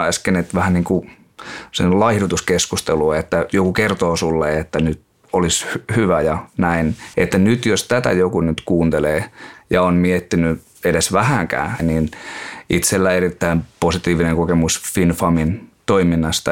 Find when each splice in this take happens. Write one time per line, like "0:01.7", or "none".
0:07.1
0:11.8